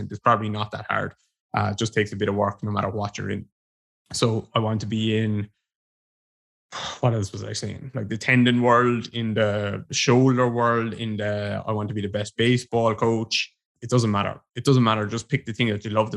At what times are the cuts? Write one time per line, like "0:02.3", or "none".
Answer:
none